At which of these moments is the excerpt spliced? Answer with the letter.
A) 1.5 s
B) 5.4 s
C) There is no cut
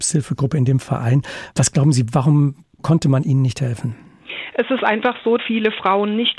B